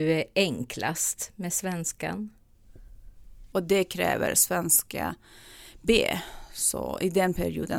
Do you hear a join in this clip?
yes; 1 cut; at 3.5 s

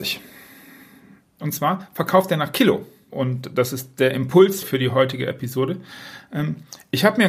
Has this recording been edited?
yes; 3 cuts; at 1.4 s, 3.1 s, 4.6 s

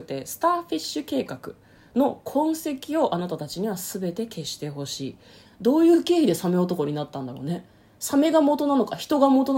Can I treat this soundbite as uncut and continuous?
no; 1 cut; at 5.5 s

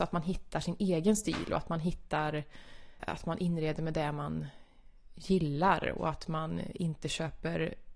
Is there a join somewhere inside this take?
yes; 1 cut; at 3.0 s

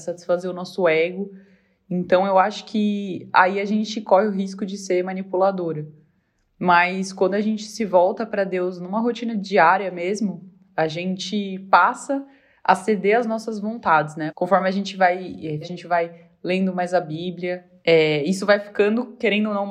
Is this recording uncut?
no; 2 cuts; at 14.3 s, 15.6 s

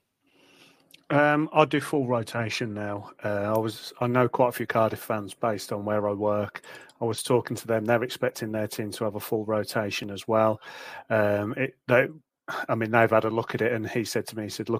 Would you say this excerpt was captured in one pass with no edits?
yes; 0 cuts

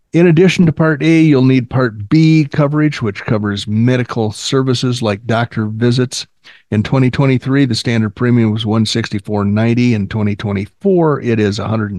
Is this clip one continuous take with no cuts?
yes; 0 cuts

